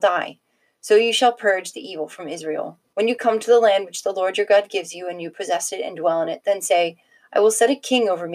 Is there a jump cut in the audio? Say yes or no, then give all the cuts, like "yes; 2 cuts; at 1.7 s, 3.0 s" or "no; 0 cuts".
yes; 1 cut; at 2.9 s